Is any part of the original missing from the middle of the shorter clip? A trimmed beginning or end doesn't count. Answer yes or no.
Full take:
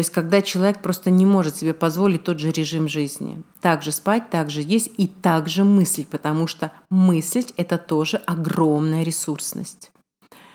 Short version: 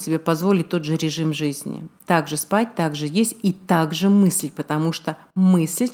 no